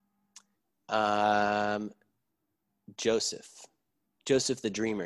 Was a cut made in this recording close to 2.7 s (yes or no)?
no